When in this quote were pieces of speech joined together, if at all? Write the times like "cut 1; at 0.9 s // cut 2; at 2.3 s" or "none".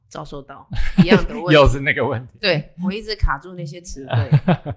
none